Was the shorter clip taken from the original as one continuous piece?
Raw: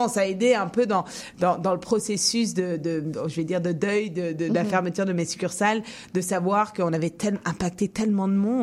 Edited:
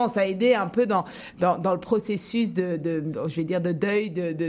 yes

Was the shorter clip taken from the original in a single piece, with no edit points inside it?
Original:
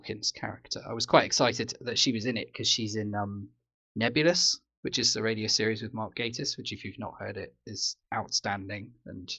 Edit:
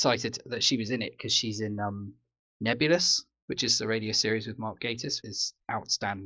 no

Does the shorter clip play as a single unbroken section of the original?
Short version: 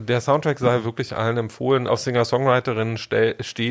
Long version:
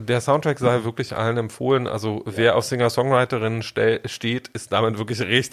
no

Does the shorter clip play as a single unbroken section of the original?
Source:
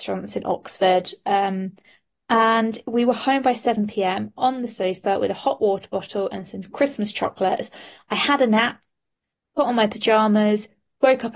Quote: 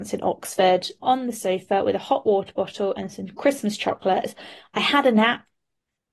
no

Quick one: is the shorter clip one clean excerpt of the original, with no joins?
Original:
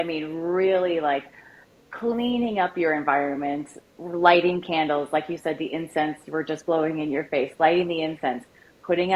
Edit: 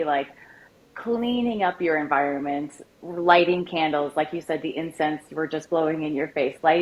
yes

